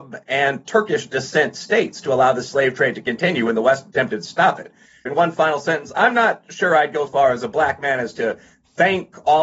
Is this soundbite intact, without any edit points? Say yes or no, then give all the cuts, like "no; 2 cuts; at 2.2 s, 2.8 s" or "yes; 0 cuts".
no; 2 cuts; at 5.1 s, 7.1 s